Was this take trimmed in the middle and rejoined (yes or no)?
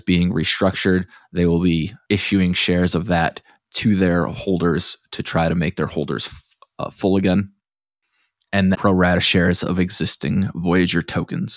yes